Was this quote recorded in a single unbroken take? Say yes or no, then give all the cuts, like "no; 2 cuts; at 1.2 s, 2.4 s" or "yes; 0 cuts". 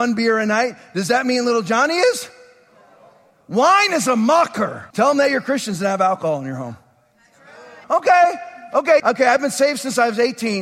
no; 3 cuts; at 4.9 s, 7.8 s, 9.0 s